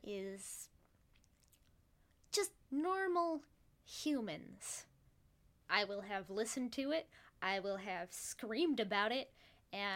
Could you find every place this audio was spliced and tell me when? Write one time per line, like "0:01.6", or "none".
0:02.6
0:05.6